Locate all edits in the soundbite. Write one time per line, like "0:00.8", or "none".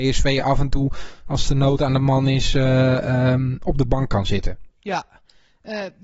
0:04.7

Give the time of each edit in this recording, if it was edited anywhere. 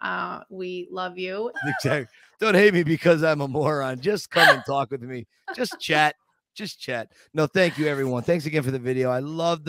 0:01.5

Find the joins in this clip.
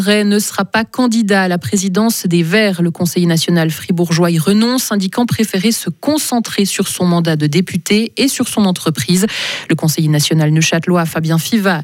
none

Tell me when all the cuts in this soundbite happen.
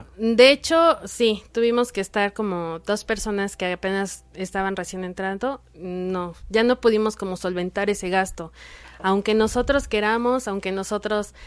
none

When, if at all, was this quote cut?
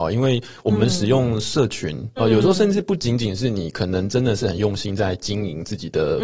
0:02.2

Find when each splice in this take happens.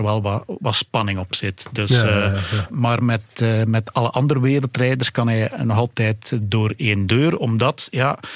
none

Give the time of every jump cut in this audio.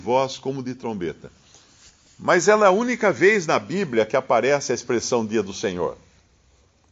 none

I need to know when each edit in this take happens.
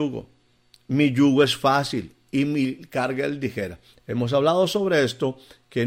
none

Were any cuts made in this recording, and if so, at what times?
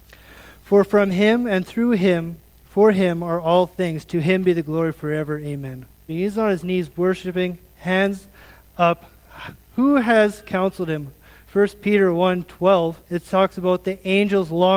0:06.1
0:11.4
0:13.0

